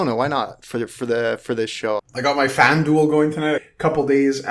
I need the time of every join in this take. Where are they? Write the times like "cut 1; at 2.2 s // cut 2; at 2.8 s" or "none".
cut 1; at 2.0 s // cut 2; at 3.6 s